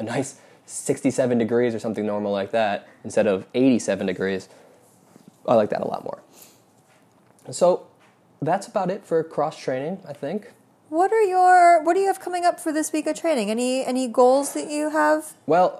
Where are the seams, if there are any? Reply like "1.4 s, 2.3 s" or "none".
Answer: none